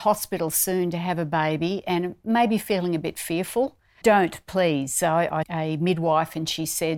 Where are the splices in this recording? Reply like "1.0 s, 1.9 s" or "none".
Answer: 4.0 s, 5.4 s